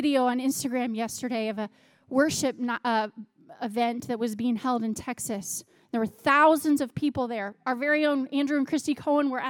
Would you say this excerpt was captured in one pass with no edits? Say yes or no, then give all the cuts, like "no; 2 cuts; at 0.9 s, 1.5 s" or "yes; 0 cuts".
yes; 0 cuts